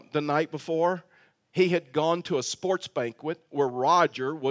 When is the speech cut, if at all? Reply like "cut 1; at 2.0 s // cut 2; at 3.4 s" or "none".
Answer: none